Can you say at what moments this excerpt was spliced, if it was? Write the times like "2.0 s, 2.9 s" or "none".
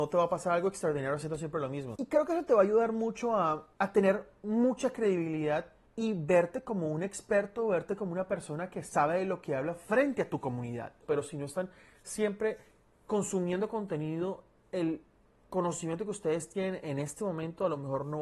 1.9 s, 11.0 s